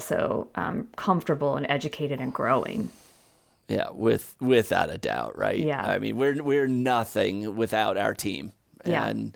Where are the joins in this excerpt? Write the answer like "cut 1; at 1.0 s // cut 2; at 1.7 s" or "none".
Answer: none